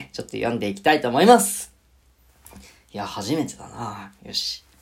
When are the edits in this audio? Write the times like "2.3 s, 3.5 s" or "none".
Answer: none